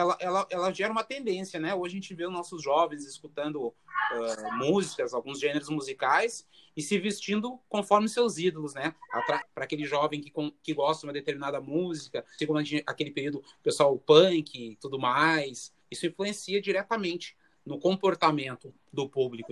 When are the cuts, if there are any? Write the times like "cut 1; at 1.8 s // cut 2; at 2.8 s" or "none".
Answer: cut 1; at 9.4 s // cut 2; at 12.4 s // cut 3; at 15.8 s